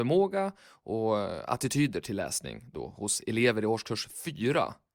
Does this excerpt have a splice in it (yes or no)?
no